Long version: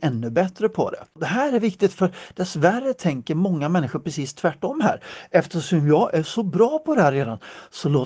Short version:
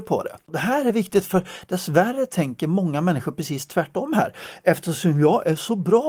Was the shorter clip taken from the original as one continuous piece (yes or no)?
yes